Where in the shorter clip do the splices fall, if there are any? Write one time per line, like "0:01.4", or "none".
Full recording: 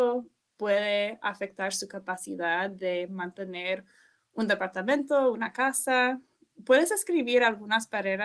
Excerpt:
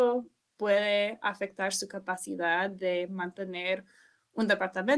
none